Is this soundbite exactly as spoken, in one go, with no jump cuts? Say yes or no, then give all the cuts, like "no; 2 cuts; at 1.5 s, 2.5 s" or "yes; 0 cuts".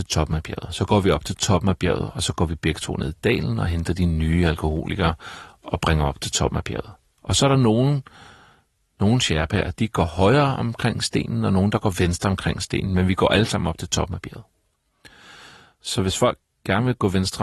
yes; 0 cuts